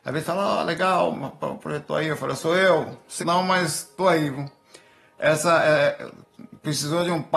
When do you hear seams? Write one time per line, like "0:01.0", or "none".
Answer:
0:03.2